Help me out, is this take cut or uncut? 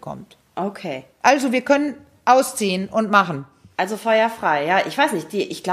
uncut